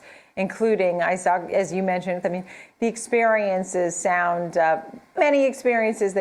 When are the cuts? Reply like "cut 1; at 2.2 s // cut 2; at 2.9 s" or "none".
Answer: cut 1; at 2.2 s // cut 2; at 5.2 s